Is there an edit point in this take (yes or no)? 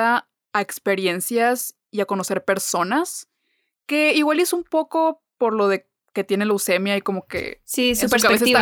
no